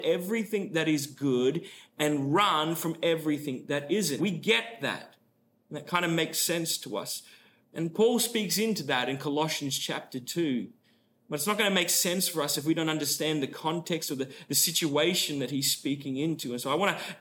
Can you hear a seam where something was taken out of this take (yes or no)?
yes